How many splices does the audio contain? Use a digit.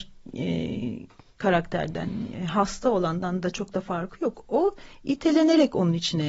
0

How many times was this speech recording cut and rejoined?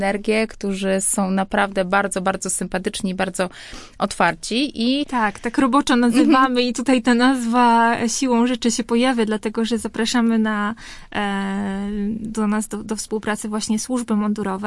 1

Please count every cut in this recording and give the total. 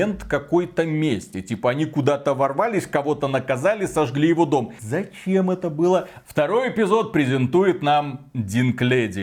2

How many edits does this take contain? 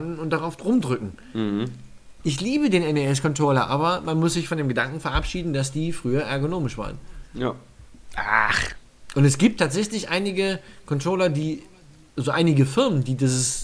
1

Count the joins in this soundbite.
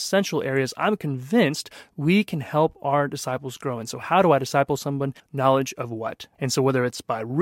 2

